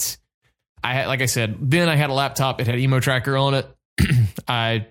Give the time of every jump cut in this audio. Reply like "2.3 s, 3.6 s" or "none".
none